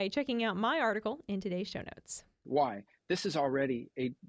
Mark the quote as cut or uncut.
cut